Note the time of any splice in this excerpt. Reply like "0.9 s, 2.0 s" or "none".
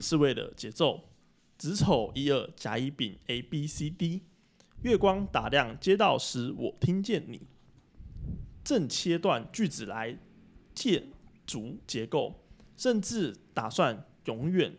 none